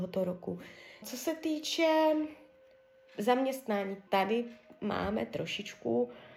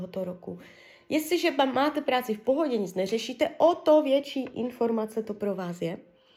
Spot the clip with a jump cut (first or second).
first